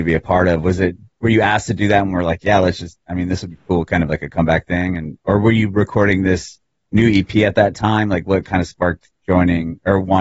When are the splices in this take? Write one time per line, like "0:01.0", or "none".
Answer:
none